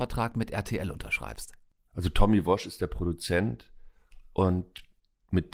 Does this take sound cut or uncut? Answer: cut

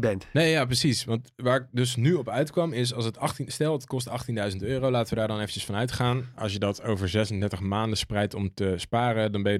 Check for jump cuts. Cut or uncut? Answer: uncut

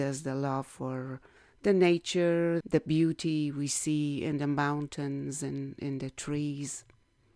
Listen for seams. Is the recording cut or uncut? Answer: cut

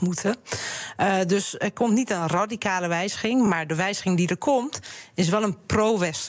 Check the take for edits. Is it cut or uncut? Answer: uncut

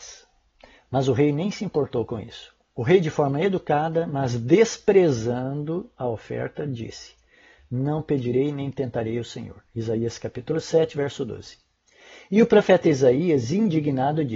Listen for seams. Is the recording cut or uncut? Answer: uncut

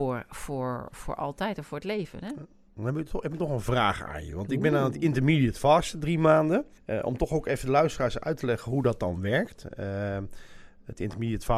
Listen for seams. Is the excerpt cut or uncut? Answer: uncut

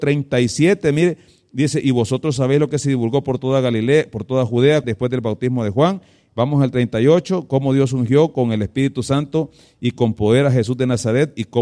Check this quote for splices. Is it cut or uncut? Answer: cut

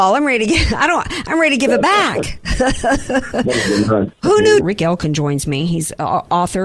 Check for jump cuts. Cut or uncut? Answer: cut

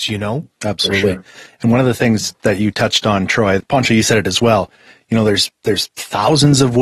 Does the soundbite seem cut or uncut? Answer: cut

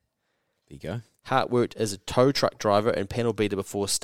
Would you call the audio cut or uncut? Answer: uncut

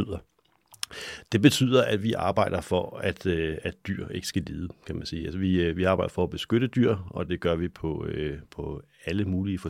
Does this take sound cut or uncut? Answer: uncut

